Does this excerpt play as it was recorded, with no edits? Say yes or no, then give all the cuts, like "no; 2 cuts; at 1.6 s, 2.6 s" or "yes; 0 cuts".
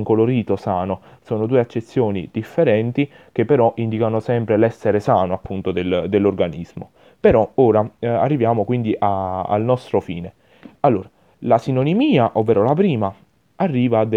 yes; 0 cuts